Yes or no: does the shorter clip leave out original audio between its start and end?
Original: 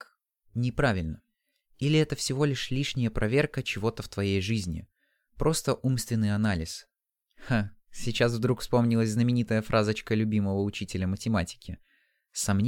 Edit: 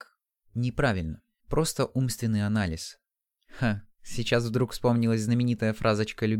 yes